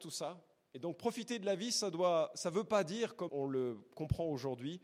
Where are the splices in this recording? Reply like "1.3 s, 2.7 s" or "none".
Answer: 3.3 s